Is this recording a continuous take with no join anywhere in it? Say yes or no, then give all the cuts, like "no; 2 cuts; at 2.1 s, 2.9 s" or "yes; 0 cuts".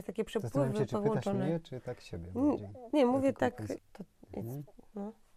no; 1 cut; at 3.8 s